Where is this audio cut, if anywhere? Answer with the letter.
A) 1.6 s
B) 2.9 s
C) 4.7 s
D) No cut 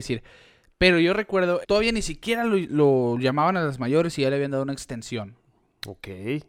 A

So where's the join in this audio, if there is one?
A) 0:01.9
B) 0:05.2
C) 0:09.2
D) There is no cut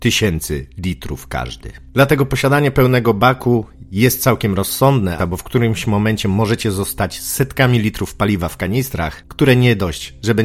B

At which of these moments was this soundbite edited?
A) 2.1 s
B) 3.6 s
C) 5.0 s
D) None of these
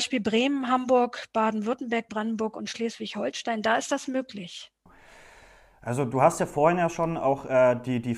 A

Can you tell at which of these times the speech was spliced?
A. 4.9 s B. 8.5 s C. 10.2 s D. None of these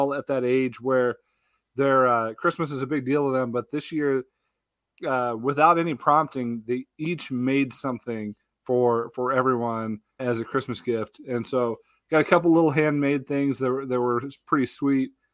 C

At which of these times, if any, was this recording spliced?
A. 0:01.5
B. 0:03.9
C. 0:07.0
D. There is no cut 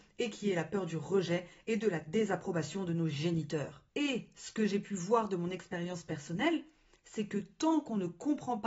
D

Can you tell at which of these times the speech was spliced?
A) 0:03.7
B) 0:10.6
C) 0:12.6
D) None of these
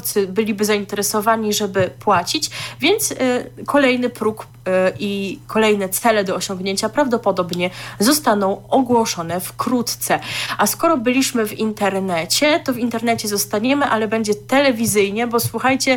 D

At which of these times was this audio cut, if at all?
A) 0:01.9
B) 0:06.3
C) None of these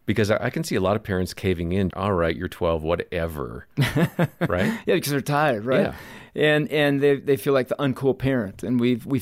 A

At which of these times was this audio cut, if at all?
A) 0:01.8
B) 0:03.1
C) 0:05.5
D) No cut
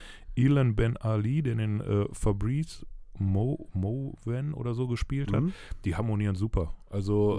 D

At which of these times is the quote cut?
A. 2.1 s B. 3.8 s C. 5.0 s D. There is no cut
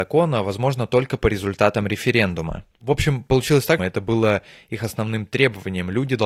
B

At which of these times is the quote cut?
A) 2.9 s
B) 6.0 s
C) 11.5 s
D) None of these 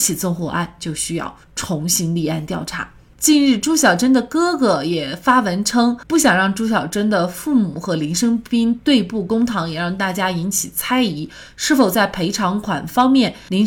D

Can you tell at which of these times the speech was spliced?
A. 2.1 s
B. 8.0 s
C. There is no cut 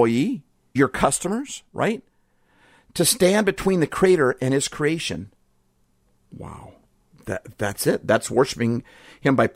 C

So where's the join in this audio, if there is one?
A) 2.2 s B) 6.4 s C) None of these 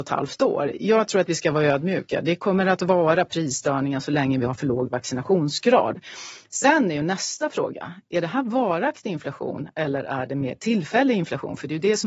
C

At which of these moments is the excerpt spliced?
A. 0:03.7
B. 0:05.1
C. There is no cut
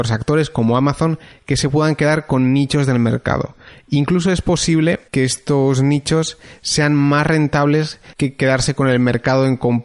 B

